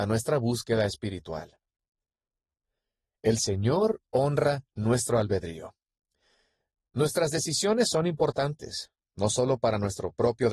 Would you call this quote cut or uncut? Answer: uncut